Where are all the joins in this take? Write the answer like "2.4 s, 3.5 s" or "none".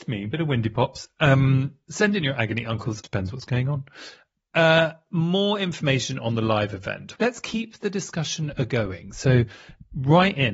3.0 s, 7.2 s